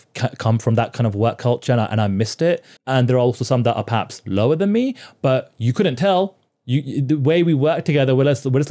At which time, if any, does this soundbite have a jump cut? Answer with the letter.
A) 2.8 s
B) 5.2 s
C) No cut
A